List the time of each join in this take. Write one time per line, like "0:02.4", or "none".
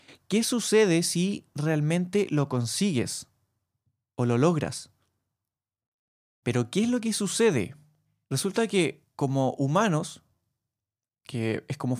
0:06.4
0:08.2